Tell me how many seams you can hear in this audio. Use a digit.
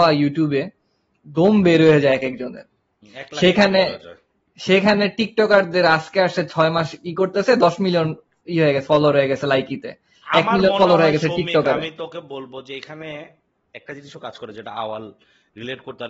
0